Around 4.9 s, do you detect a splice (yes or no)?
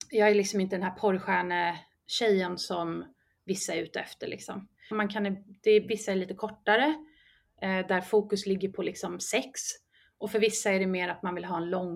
yes